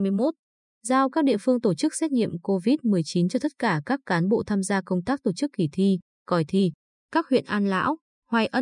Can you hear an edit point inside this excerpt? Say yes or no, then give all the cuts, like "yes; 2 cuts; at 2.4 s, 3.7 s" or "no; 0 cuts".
no; 0 cuts